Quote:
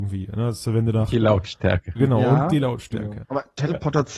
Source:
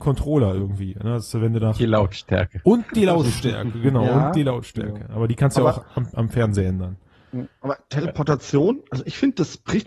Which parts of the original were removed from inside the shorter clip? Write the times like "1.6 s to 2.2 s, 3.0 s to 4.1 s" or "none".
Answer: 2.6 s to 3.8 s, 5.1 s to 7.6 s